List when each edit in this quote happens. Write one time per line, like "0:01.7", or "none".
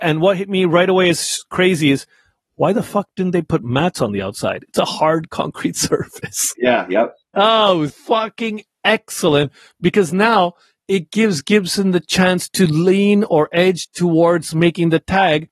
0:06.5
0:07.9